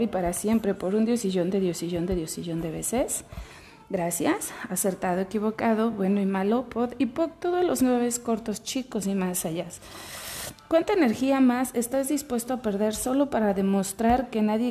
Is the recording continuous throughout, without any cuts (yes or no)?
yes